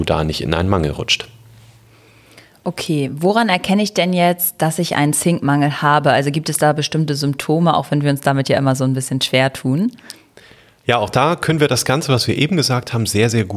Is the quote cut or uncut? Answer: uncut